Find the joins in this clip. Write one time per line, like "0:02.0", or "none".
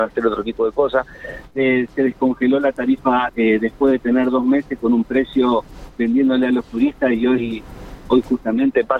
0:01.5
0:03.3